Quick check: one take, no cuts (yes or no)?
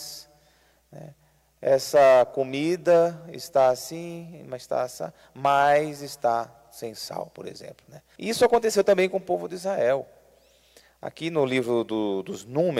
no